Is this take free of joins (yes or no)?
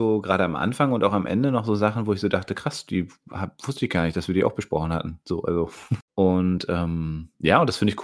no